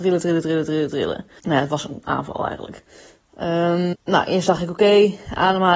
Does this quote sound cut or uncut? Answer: cut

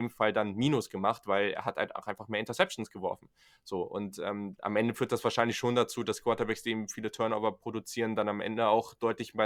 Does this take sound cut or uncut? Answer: cut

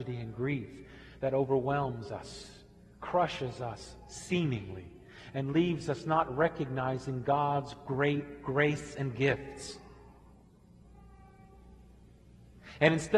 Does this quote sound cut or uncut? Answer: uncut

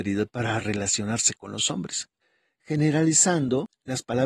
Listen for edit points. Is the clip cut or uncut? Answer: uncut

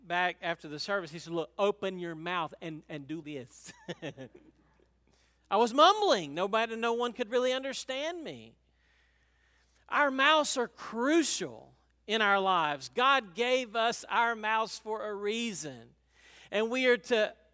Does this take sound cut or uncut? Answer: cut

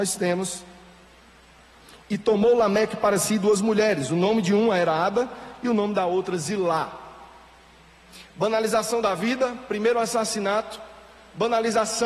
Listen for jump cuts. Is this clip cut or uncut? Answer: uncut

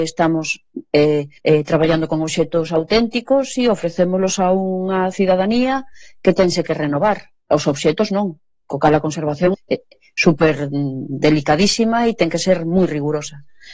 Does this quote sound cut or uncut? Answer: cut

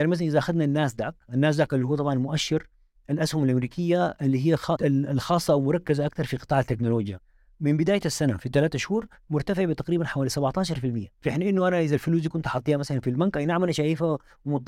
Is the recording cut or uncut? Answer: cut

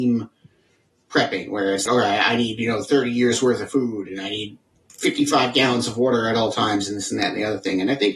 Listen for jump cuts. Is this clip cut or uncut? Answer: cut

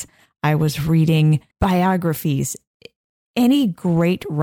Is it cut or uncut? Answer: cut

